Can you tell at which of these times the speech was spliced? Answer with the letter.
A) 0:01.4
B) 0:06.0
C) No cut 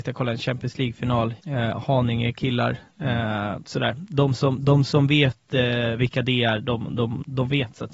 A